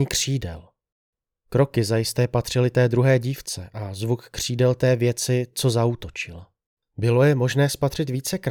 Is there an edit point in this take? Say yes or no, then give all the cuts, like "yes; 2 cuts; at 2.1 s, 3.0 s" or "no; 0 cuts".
yes; 1 cut; at 6.8 s